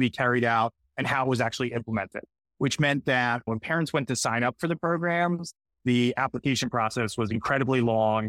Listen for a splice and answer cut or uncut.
uncut